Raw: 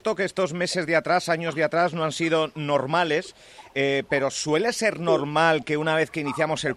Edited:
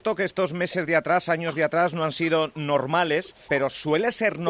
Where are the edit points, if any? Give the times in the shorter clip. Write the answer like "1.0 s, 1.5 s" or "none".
3.5 s